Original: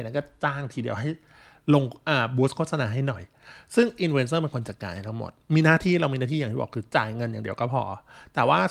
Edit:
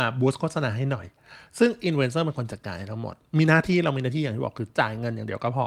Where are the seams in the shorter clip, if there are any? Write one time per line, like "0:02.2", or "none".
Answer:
none

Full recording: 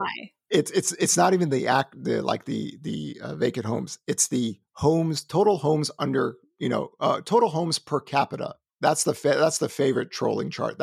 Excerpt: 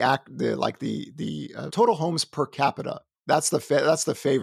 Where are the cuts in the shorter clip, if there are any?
0:01.7

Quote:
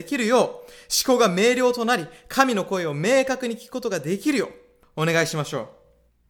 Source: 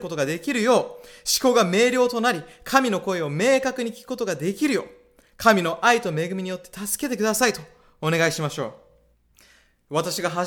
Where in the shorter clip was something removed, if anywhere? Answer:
0:04.8

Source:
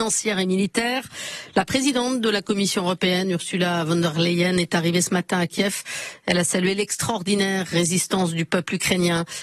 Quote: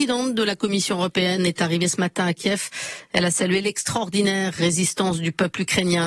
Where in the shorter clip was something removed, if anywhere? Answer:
0:01.4

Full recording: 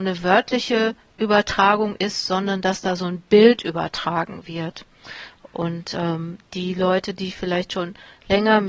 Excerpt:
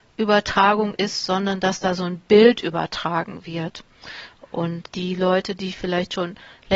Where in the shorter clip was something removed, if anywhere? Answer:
0:04.9

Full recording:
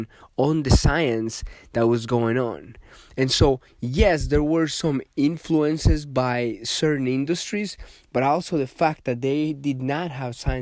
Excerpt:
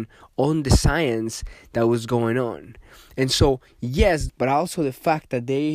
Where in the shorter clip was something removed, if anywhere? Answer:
0:04.3

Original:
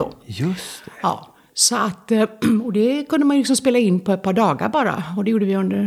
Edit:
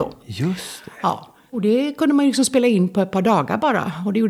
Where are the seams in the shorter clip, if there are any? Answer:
0:01.5

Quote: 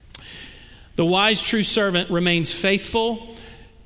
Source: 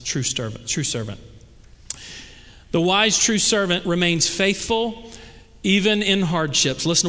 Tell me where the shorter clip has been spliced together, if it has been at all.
none

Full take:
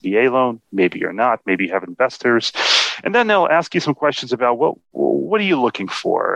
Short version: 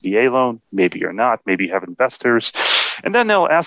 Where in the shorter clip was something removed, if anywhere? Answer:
none

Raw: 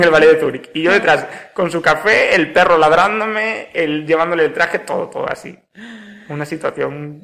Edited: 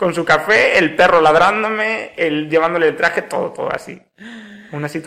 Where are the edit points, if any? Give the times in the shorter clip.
none

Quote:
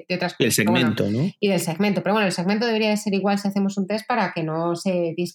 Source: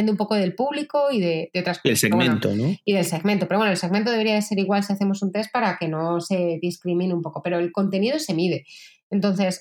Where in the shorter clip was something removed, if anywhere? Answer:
none

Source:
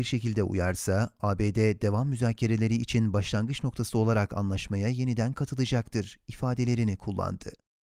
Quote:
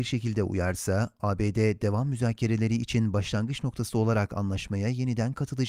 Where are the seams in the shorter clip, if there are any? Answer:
none

